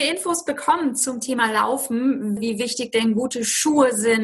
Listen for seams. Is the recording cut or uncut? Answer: cut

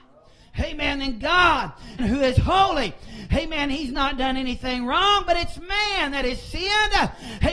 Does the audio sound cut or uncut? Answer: cut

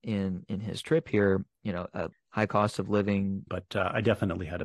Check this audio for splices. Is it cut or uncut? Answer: cut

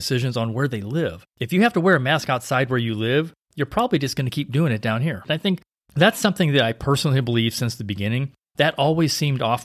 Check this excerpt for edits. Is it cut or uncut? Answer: cut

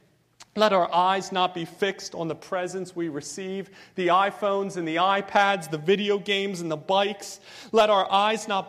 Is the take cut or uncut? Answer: uncut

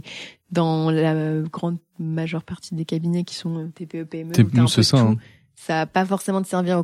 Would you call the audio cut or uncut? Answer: uncut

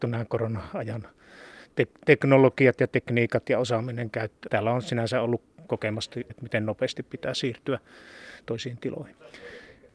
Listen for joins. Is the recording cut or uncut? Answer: cut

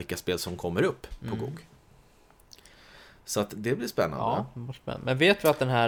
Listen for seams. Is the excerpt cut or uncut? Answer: uncut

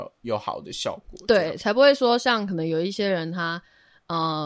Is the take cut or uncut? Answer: uncut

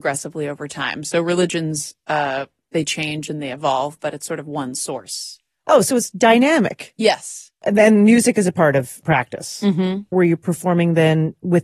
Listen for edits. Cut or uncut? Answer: uncut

